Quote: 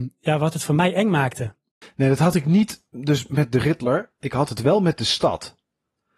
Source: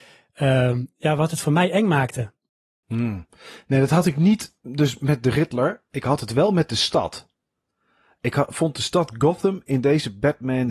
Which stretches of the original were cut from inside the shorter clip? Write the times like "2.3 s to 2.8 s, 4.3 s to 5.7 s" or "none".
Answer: 2.6 s to 3.5 s